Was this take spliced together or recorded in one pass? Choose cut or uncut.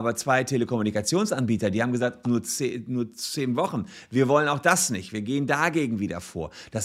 cut